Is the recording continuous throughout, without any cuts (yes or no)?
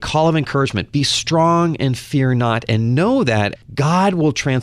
no